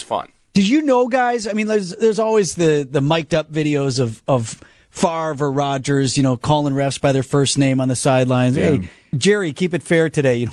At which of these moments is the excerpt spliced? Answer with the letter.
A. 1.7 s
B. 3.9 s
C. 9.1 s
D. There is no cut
C